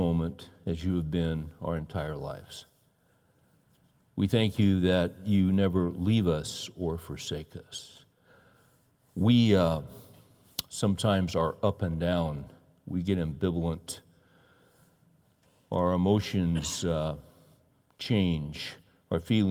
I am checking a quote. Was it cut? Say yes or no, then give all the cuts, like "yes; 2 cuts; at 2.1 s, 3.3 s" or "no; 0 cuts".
no; 0 cuts